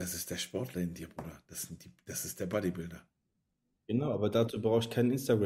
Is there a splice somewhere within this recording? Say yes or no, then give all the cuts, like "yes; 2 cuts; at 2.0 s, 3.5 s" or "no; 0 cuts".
no; 0 cuts